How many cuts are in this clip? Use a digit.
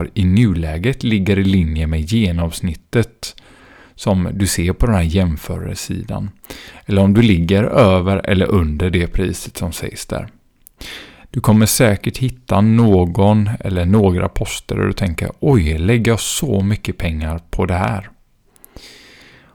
1